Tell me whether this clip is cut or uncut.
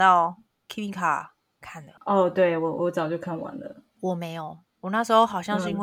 cut